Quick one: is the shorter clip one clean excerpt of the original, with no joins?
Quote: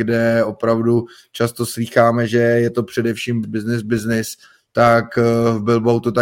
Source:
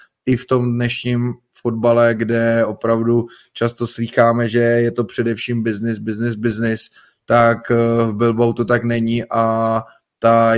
no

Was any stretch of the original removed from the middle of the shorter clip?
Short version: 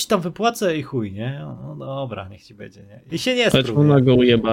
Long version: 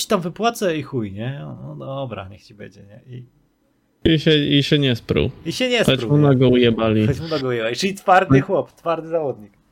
yes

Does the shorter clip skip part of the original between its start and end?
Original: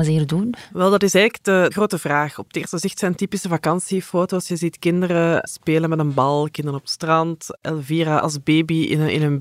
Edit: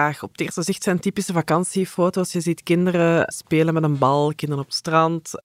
no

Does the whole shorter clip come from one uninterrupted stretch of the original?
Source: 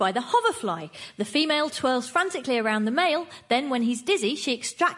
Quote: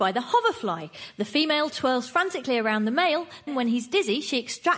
no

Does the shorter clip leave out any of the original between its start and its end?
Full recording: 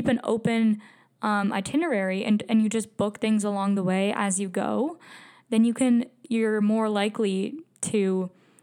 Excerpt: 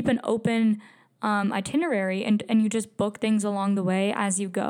no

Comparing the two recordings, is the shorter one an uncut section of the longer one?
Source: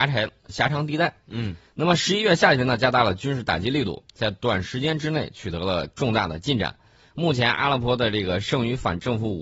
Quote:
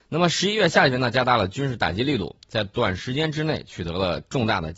yes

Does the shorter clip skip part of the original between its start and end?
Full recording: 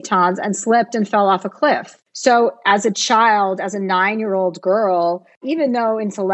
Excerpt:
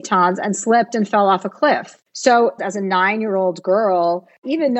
yes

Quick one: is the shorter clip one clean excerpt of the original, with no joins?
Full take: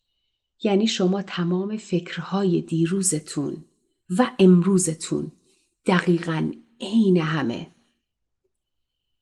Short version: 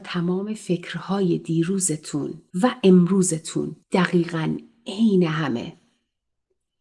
no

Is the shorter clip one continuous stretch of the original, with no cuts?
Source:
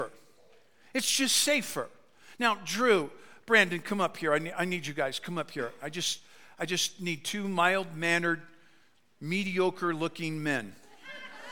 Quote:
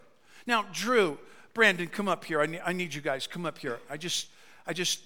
yes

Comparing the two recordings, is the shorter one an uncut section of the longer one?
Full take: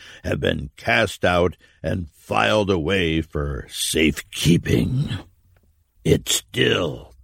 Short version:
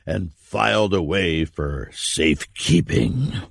yes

